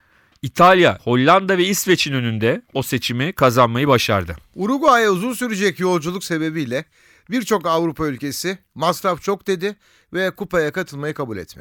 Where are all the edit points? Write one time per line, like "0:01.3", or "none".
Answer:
0:01.0